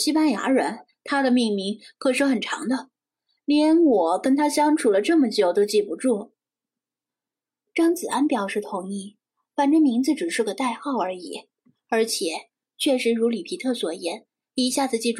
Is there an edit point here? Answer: yes; 1 cut; at 7.1 s

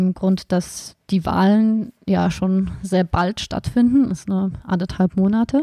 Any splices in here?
no; 0 cuts

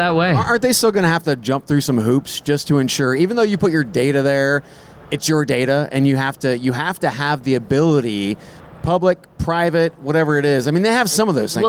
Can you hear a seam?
no; 0 cuts

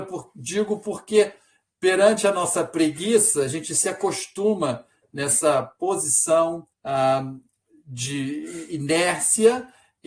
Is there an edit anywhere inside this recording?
yes; 1 cut; at 6.7 s

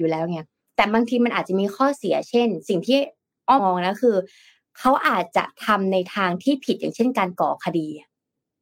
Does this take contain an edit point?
yes; 1 cut; at 3.6 s

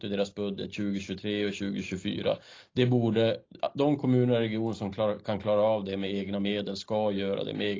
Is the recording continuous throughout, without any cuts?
yes; 0 cuts

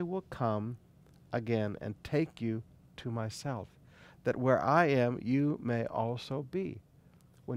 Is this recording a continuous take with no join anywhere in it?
yes; 0 cuts

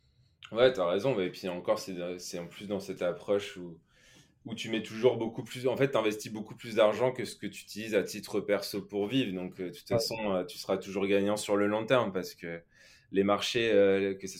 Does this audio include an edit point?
no; 0 cuts

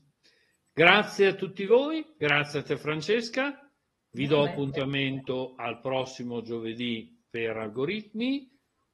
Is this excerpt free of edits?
yes; 0 cuts

